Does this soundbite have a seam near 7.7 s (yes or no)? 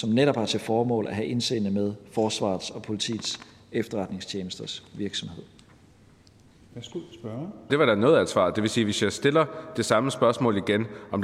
yes